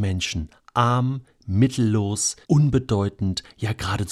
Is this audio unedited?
no; 1 cut; at 2.4 s

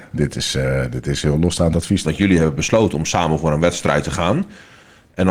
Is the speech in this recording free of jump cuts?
no; 1 cut; at 2.0 s

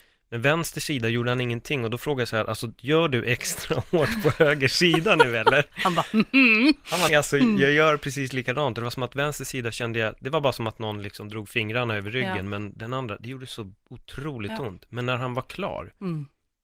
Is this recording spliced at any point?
yes; 1 cut; at 7.1 s

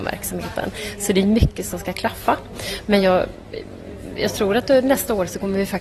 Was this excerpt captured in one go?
yes; 0 cuts

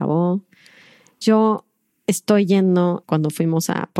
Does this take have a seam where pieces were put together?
yes; 2 cuts; at 1.2 s, 3.0 s

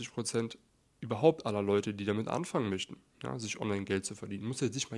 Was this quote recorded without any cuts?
yes; 0 cuts

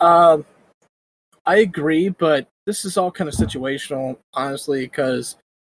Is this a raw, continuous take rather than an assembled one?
no; 1 cut; at 2.5 s

